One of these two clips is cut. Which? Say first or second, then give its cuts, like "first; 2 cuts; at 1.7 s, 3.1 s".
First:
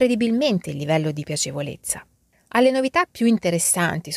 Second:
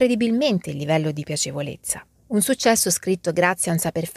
second; 1 cut; at 2.1 s